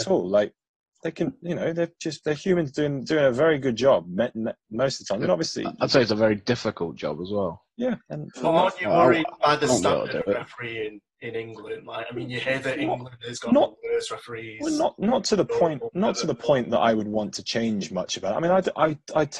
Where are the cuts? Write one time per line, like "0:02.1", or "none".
none